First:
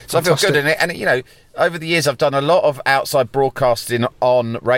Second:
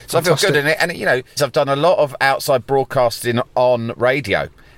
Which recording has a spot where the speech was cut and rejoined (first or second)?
second